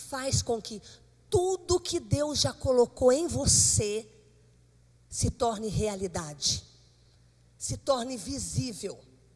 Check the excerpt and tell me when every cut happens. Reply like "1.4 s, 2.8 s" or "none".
none